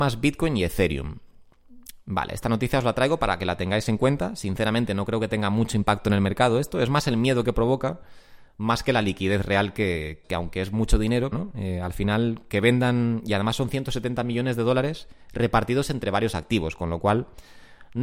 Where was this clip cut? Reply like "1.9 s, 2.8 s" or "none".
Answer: 10.2 s, 11.3 s